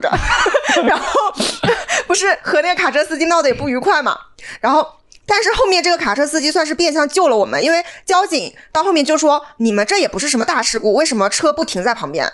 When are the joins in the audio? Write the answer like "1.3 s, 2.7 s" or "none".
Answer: none